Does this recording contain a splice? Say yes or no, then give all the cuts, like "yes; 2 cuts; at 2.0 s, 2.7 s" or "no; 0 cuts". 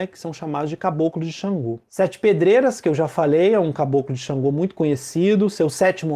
yes; 1 cut; at 1.9 s